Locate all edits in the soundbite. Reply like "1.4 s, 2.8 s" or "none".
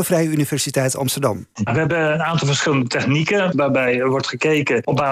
1.7 s, 3.5 s